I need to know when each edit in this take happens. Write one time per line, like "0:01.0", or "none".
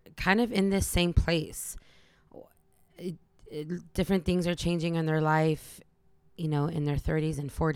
none